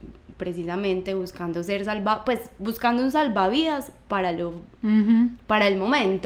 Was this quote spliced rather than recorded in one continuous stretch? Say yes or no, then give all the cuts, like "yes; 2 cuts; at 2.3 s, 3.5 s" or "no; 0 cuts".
no; 0 cuts